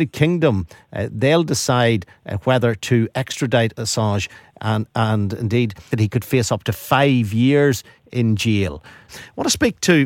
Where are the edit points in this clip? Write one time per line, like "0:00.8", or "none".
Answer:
0:05.9
0:09.1